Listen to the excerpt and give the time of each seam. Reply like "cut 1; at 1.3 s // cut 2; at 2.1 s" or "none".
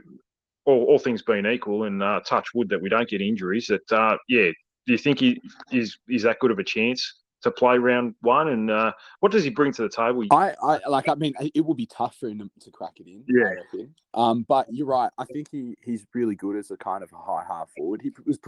cut 1; at 10.3 s